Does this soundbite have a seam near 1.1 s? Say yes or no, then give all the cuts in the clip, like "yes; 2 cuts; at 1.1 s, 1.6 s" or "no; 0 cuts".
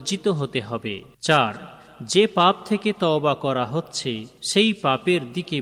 yes; 2 cuts; at 1.1 s, 4.4 s